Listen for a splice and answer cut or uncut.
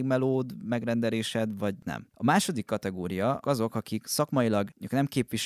cut